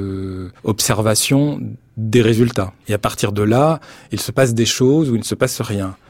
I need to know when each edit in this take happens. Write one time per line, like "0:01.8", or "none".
0:02.8